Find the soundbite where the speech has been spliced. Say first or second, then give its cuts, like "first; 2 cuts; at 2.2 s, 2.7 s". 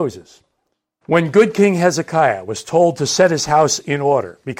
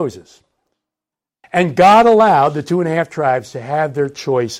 first; 1 cut; at 1.0 s